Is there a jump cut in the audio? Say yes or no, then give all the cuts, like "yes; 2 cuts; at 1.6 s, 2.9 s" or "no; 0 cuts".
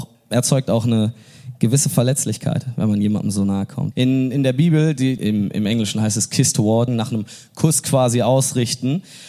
yes; 3 cuts; at 3.9 s, 5.2 s, 6.9 s